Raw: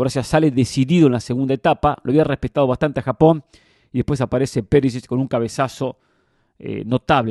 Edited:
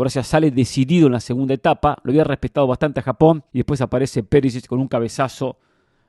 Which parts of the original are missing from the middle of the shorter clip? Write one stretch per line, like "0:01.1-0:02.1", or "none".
0:03.5-0:03.9